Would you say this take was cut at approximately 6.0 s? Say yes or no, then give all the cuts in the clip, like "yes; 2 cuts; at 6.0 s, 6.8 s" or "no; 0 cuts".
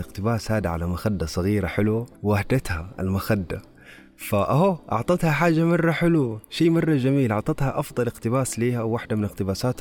no; 1 cut; at 2.2 s